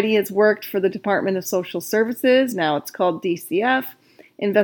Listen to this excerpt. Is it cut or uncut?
uncut